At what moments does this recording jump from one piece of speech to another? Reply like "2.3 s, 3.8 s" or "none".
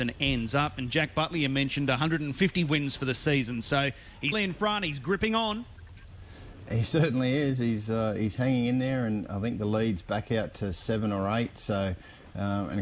4.3 s